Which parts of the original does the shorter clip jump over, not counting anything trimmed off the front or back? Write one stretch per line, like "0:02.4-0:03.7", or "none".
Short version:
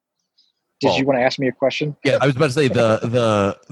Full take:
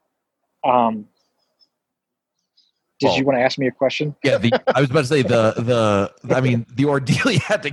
0:04.4-0:04.7